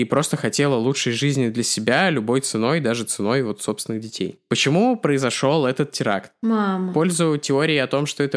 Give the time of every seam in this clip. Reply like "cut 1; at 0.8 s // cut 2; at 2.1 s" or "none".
none